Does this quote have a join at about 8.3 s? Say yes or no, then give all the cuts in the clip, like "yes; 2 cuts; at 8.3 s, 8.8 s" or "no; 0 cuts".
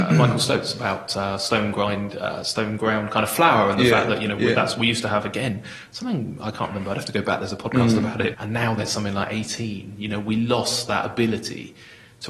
yes; 1 cut; at 8.3 s